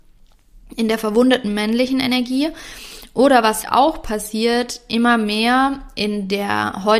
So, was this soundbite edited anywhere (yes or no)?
yes